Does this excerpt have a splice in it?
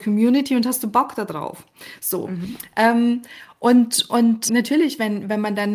yes; 2 cuts; at 2.0 s, 4.5 s

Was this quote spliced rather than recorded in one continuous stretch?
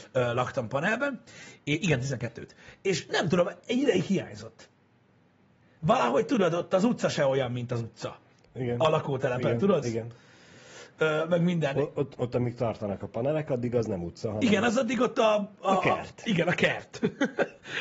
yes; 1 cut; at 9.8 s

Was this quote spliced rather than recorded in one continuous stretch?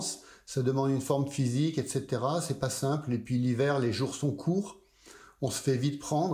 no; 0 cuts

